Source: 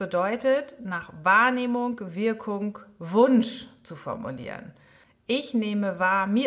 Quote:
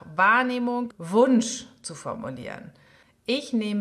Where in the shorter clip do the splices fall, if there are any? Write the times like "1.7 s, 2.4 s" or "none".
0.9 s